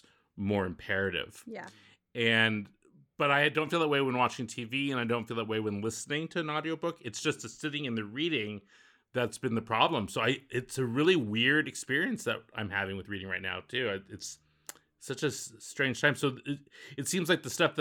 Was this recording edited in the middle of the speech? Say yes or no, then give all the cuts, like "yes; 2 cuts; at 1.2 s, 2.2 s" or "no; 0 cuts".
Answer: no; 0 cuts